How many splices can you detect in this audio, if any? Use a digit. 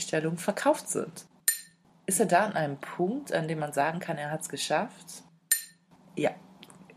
0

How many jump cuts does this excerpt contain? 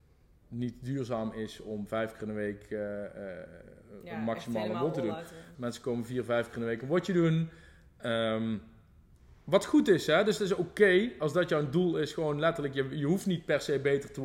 1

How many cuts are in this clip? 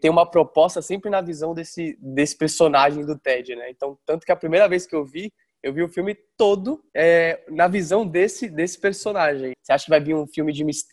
2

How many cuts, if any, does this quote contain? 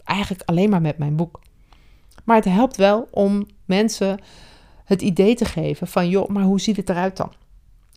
0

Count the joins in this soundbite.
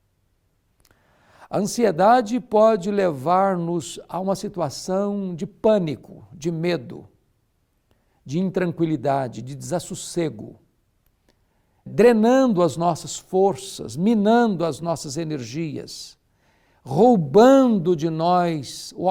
1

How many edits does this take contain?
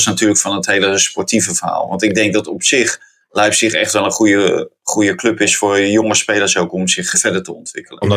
1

